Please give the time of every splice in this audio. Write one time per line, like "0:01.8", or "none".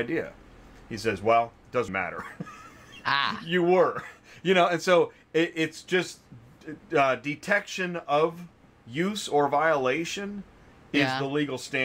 0:01.9